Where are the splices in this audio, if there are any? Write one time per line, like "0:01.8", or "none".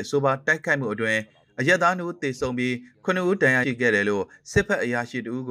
0:03.6